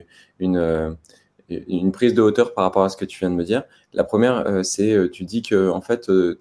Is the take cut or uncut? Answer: uncut